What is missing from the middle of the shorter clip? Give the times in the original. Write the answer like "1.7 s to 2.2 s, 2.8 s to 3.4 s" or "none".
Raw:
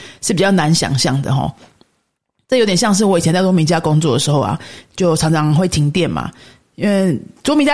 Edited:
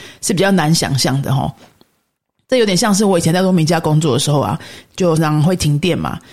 5.2 s to 5.3 s